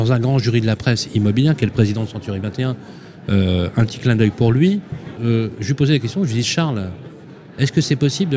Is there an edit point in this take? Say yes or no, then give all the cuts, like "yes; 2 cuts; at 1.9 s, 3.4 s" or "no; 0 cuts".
yes; 1 cut; at 5.2 s